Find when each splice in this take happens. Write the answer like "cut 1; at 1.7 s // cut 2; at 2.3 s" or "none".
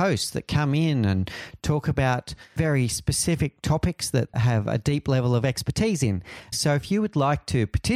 cut 1; at 4.3 s // cut 2; at 6.5 s